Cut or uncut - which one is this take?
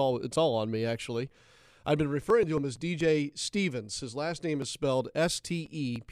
uncut